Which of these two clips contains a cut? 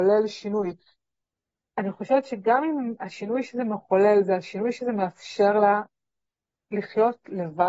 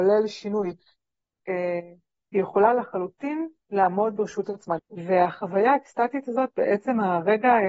second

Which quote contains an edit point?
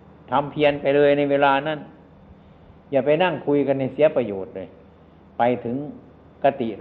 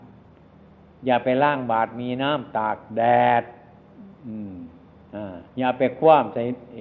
second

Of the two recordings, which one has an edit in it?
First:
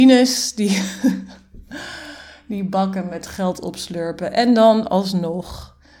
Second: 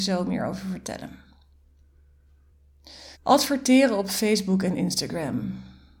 second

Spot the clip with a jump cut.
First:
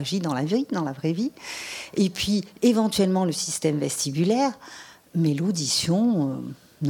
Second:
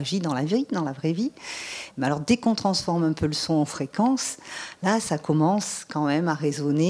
second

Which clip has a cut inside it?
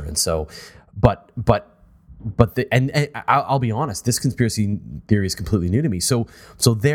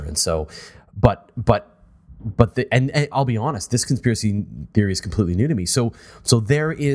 second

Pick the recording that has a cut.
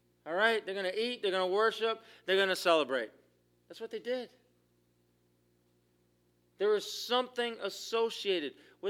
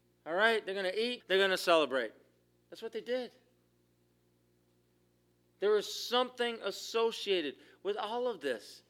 second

